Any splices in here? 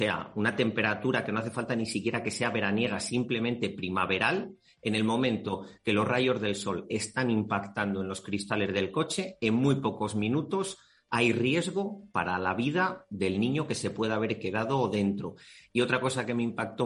no; 0 cuts

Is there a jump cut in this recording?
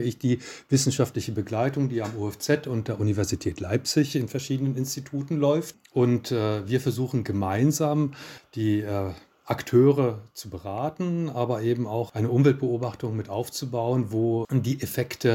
no; 0 cuts

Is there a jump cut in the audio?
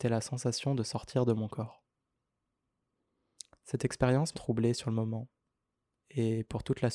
yes; 1 cut; at 4.3 s

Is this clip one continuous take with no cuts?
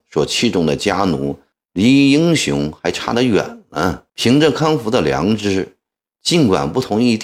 no; 2 cuts; at 1.5 s, 4.1 s

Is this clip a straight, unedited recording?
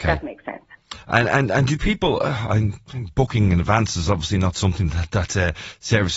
yes; 0 cuts

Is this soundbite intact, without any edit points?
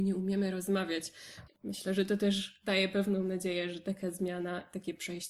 no; 1 cut; at 1.5 s

